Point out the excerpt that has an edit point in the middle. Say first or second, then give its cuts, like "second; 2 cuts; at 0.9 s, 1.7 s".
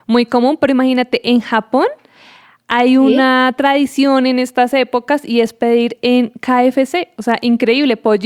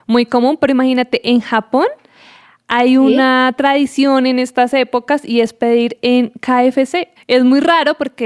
second; 1 cut; at 7.2 s